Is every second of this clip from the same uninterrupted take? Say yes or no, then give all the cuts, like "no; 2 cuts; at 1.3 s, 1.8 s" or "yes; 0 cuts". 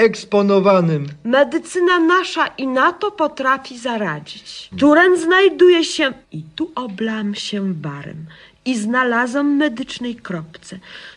no; 2 cuts; at 4.7 s, 6.2 s